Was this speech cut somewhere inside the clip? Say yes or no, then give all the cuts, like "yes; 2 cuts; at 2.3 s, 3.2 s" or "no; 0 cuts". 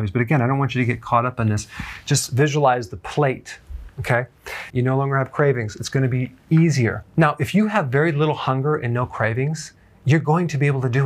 yes; 1 cut; at 4.7 s